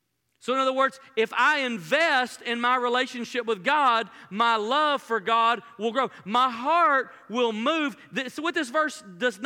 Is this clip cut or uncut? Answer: uncut